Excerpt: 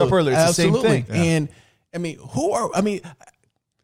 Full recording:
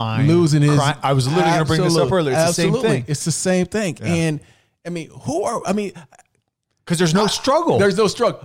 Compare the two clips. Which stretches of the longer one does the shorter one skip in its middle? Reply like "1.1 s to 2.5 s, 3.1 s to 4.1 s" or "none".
3.1 s to 4.0 s

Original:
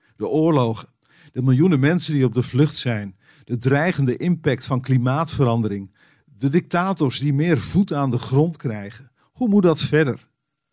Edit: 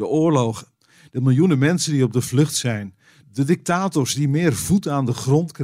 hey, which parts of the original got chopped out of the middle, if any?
3.4 s to 6.2 s

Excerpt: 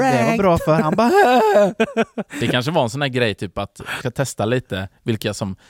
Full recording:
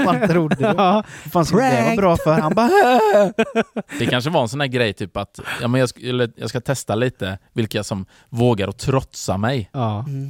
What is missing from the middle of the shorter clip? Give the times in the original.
5.6 s to 6.5 s

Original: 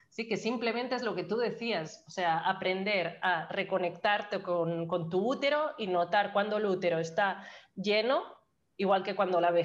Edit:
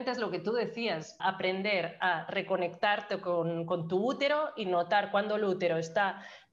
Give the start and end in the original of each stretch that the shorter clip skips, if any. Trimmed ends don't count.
2.0 s to 2.4 s

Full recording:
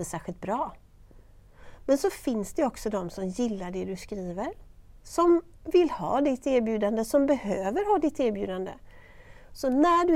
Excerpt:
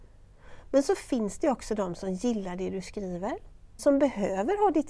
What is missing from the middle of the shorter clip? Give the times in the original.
4.9 s to 7.1 s

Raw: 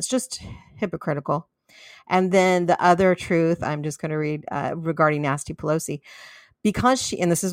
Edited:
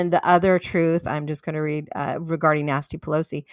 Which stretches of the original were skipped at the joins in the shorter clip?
none

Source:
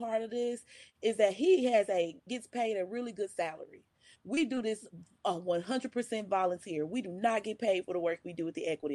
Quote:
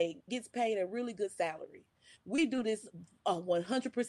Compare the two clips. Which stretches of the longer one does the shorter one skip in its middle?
none

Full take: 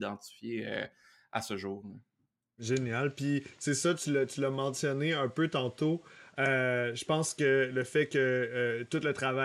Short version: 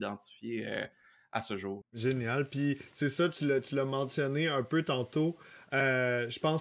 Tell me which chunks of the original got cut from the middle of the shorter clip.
1.8 s to 2.5 s

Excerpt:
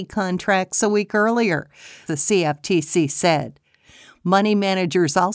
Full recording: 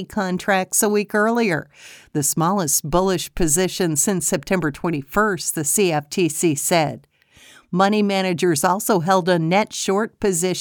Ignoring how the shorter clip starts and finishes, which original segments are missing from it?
2.1 s to 5.5 s

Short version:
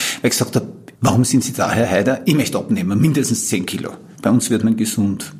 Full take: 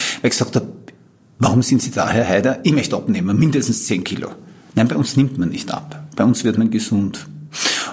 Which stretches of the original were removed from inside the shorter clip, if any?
0.9 s to 1.3 s, 4.5 s to 6.1 s

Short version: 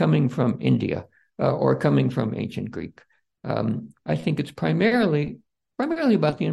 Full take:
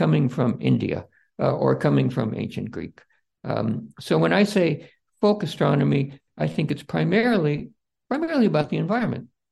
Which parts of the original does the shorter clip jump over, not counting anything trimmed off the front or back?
3.9 s to 6.3 s

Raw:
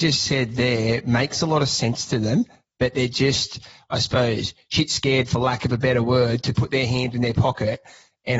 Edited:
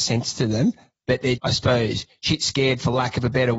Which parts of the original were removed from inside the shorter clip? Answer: 3.1 s to 3.9 s

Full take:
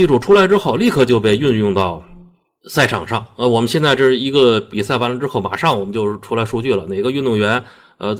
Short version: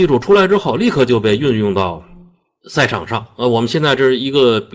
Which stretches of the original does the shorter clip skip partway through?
none

